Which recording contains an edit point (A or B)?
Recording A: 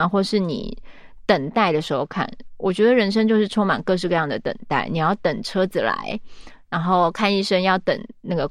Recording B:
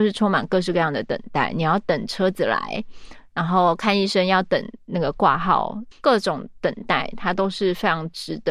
B